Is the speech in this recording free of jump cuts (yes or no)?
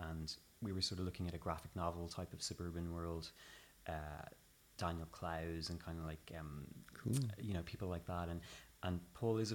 yes